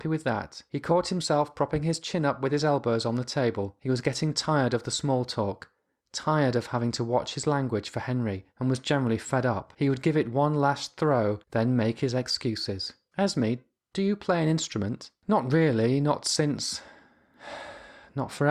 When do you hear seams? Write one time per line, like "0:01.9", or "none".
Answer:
0:08.5
0:11.4